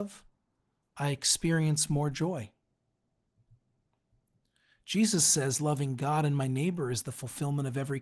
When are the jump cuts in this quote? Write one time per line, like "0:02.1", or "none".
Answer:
none